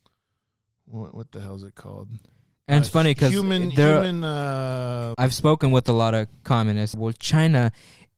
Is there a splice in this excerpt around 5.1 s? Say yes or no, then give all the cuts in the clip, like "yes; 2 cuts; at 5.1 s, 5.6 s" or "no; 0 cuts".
yes; 2 cuts; at 5.1 s, 6.9 s